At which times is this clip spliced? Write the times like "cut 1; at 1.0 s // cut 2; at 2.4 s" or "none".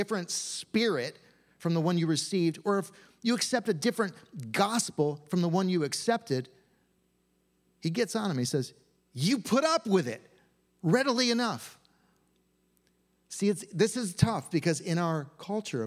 none